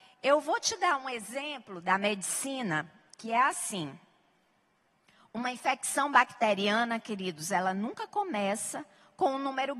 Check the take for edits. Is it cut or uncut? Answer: uncut